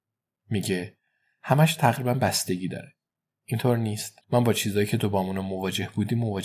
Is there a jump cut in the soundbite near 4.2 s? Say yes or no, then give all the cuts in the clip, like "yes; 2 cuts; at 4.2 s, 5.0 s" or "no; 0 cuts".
yes; 1 cut; at 4.2 s